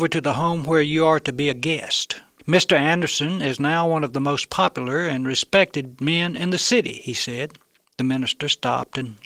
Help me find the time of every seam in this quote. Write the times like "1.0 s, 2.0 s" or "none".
2.4 s, 7.8 s